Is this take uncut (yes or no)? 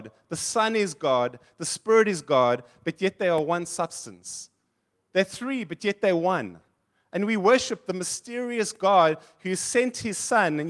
yes